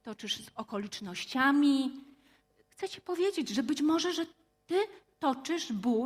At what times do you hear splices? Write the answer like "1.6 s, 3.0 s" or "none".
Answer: 2.6 s